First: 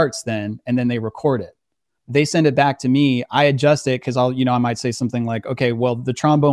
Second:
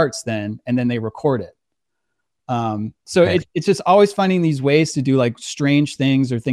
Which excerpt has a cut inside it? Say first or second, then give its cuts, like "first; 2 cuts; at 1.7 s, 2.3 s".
first; 1 cut; at 2.0 s